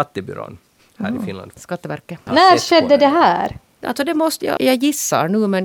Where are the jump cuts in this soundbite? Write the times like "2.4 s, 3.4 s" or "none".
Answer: 2.3 s, 4.6 s